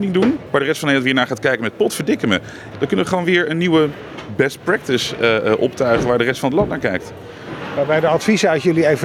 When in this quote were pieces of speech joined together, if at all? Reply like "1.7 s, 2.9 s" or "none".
2.7 s